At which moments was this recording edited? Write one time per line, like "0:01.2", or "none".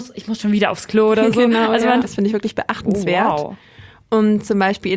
0:02.0